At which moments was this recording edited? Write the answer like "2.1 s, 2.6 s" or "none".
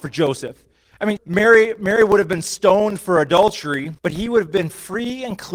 1.2 s, 4.0 s